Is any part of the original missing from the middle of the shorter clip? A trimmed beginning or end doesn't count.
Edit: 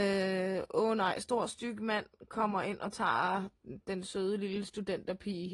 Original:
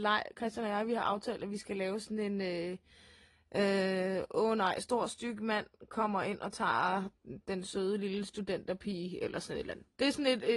no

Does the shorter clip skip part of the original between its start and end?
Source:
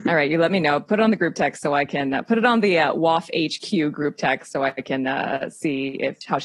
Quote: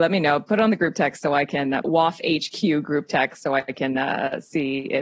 yes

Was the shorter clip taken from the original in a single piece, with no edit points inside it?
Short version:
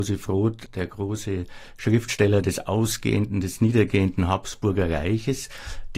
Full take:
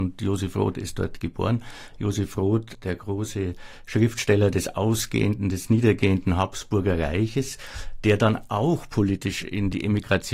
yes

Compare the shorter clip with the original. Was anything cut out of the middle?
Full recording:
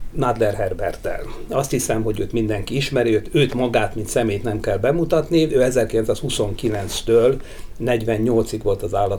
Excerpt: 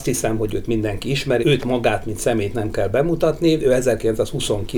yes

